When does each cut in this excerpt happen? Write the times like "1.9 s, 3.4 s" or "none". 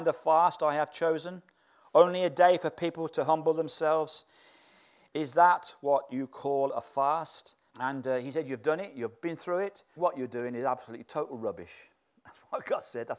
5.1 s, 7.7 s, 10.0 s